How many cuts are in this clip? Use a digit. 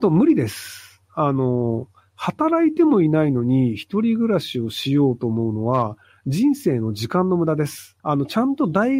1